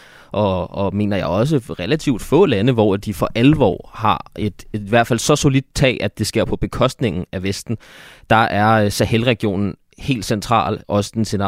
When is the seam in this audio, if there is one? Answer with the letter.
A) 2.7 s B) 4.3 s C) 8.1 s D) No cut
D